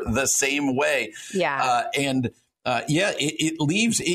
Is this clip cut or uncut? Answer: uncut